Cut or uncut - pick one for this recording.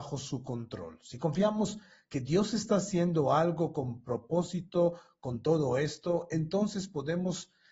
uncut